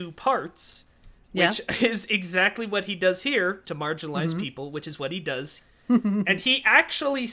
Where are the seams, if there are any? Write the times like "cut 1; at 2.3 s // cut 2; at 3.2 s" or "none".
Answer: cut 1; at 3.6 s // cut 2; at 5.6 s

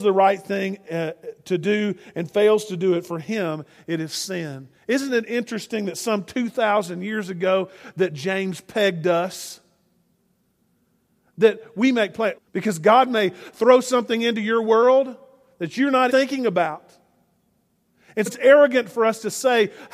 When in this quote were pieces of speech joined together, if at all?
cut 1; at 12.3 s // cut 2; at 16.1 s // cut 3; at 18.3 s

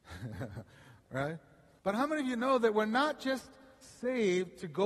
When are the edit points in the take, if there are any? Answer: cut 1; at 1.8 s

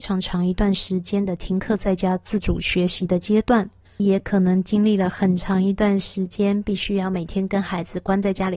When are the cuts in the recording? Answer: cut 1; at 4.0 s

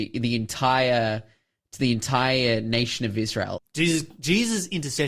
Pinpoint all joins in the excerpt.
cut 1; at 3.6 s

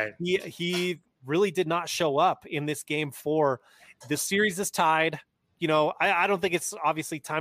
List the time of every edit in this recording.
none

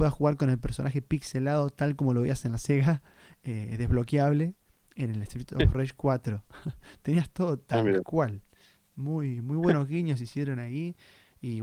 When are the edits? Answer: none

